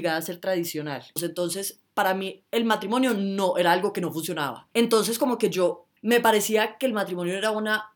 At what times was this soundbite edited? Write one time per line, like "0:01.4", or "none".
0:01.2
0:04.7
0:06.0